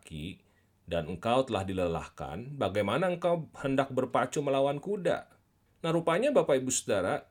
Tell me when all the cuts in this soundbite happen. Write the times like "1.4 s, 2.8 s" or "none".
5.7 s